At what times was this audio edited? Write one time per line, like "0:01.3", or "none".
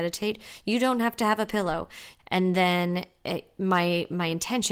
0:02.2